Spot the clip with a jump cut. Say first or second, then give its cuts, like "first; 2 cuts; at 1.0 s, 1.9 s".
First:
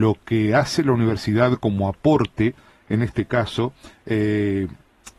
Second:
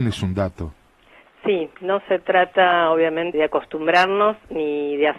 second; 1 cut; at 3.3 s